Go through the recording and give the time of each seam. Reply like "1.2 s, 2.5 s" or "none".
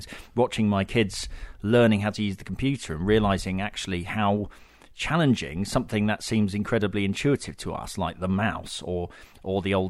none